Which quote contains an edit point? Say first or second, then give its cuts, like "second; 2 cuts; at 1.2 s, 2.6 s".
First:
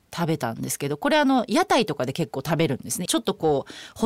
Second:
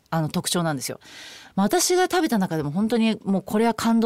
first; 1 cut; at 3.1 s